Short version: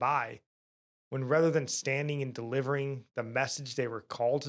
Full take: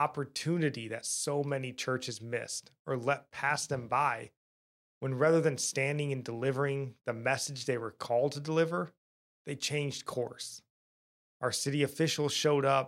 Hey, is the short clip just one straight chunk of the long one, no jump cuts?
yes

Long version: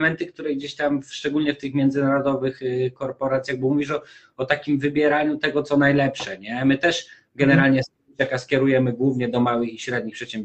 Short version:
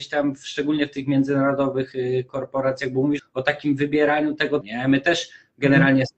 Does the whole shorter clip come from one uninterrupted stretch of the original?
no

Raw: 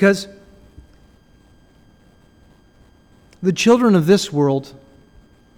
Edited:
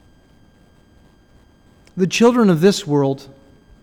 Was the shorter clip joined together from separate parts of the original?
no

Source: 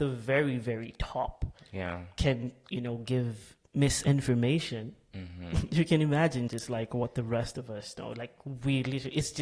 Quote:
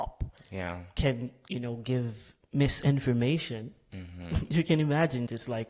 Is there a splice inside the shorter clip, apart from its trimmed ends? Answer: no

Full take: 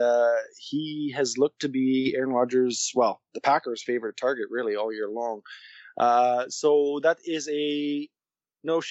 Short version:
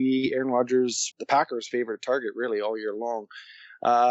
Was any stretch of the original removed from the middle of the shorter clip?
yes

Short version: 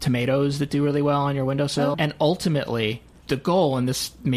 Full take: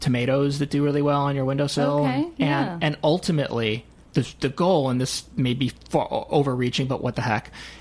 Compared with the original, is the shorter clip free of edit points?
no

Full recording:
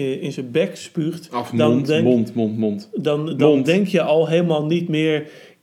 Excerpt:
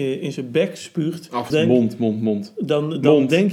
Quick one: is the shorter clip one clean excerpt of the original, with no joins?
no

